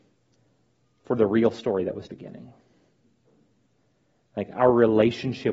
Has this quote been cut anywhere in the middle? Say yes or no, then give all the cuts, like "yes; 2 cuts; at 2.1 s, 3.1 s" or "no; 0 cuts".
yes; 1 cut; at 2.1 s